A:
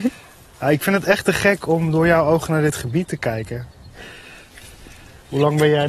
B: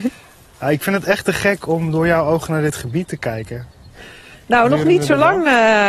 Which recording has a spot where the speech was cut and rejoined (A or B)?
B